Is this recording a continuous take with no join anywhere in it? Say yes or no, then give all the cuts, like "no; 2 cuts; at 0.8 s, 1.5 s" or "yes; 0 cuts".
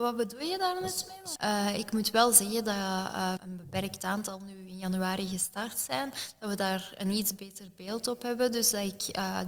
no; 2 cuts; at 1.4 s, 3.4 s